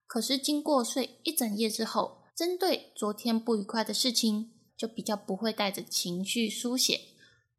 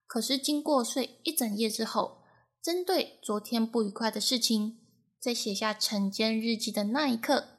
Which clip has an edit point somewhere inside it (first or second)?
first